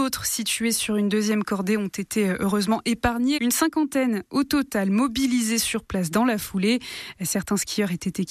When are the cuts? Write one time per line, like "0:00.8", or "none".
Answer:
0:03.4